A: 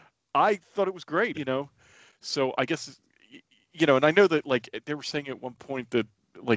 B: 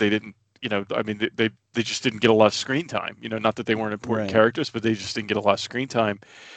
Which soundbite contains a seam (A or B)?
A